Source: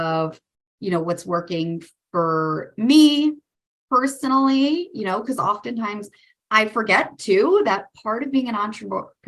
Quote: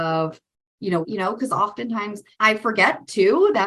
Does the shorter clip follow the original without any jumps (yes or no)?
no